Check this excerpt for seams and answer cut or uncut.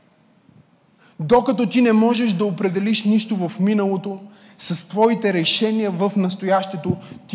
uncut